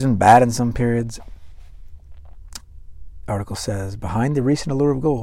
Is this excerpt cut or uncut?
uncut